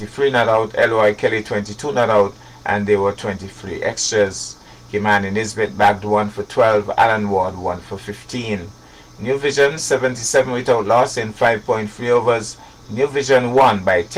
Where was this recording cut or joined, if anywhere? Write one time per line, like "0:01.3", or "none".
0:12.8